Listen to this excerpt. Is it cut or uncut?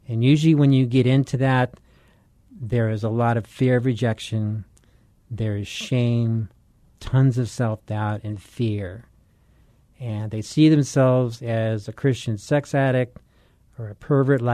uncut